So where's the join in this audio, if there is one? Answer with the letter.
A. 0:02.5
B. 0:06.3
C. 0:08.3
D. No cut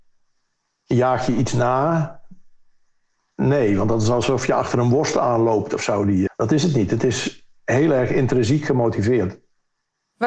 B